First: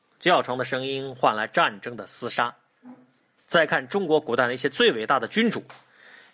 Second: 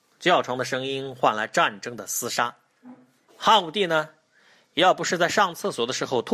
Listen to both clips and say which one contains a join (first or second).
second